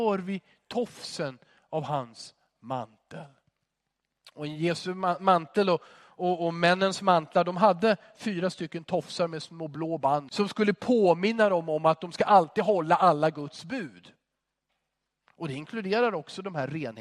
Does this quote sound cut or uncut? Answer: cut